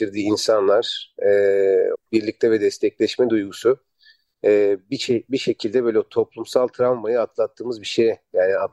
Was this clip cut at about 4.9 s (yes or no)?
no